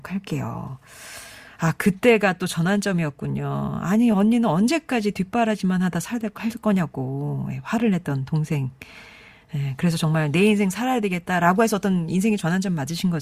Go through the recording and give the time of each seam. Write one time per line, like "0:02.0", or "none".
none

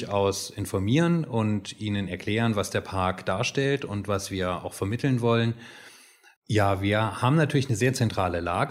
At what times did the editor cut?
0:06.4

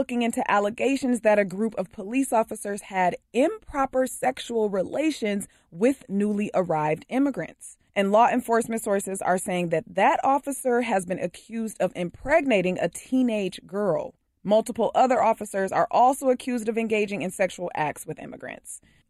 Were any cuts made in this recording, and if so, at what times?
0:07.9

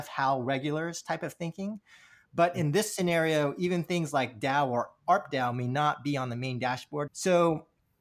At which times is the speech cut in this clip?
0:07.1

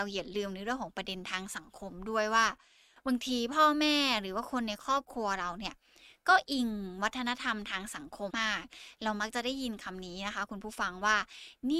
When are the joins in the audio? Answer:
0:08.3

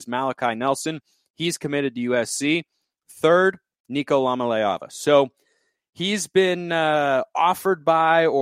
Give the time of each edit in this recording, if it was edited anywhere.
none

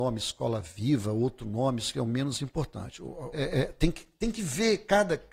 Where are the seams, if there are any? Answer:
0:03.3

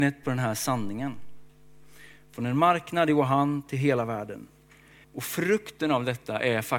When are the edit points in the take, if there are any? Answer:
0:05.0

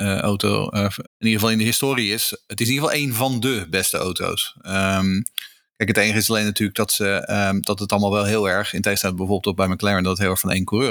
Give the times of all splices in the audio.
0:01.0

